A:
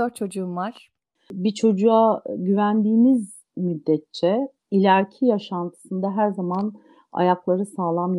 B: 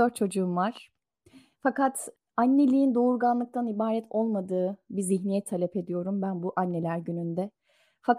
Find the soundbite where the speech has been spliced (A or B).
A